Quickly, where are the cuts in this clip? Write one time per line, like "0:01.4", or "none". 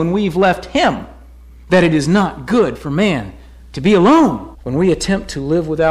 0:04.5